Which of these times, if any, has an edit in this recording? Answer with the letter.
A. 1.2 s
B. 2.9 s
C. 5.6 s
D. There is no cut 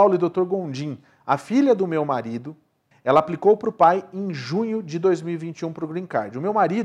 B